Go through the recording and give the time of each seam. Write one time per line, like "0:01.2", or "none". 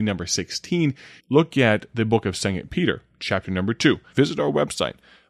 0:01.2
0:04.1